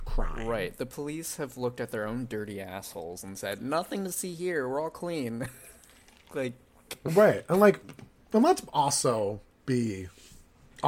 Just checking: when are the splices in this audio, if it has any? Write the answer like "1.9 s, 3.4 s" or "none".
none